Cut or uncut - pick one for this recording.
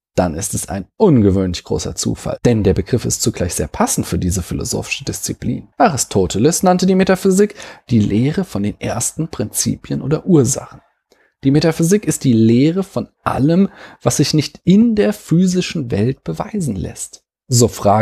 cut